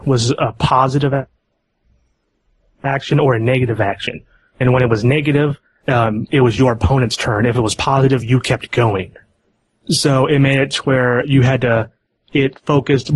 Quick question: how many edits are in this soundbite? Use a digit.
0